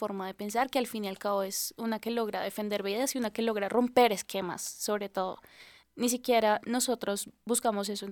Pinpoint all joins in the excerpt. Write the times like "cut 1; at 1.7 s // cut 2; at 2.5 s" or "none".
cut 1; at 5.8 s